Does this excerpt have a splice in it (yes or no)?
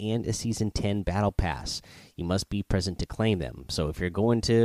no